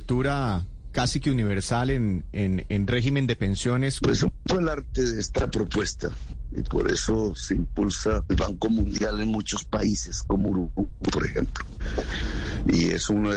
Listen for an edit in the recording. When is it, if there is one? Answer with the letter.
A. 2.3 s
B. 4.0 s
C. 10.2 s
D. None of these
B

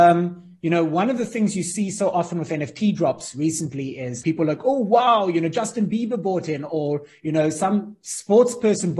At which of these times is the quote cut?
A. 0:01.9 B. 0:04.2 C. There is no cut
B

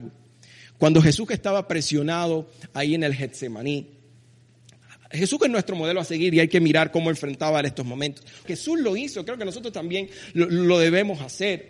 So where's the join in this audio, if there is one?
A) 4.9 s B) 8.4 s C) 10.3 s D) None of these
B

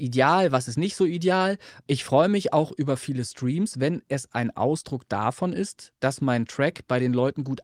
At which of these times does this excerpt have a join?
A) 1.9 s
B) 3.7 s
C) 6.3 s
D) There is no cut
A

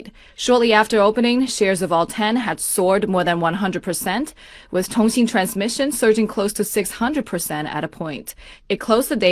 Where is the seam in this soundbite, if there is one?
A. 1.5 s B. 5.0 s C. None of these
C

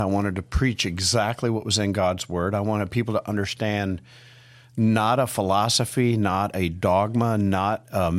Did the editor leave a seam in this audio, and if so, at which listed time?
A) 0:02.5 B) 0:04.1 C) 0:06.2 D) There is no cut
D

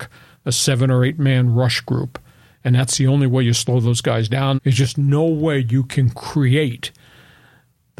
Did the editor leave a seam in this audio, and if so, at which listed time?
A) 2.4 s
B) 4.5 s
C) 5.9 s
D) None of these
B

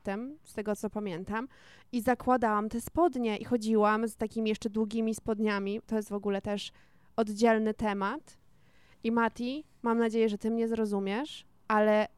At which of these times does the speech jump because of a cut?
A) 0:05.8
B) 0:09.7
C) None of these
C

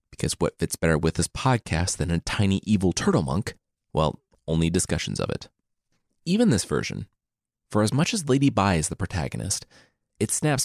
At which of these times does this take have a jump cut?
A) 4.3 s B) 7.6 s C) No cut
A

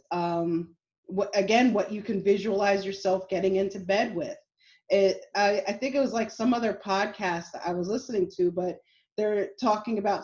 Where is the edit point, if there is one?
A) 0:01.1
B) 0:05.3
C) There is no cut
B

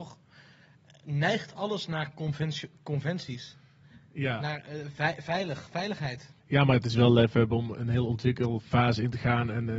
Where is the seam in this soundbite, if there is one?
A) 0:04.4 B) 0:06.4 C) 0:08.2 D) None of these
B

